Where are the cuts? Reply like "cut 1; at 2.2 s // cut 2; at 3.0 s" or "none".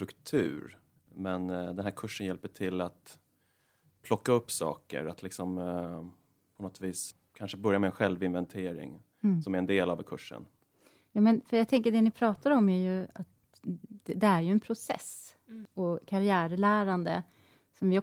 cut 1; at 1.0 s